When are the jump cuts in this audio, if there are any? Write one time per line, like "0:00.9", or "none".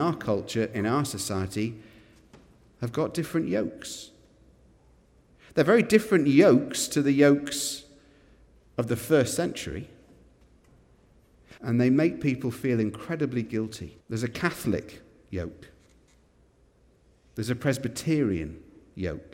0:11.6
0:14.0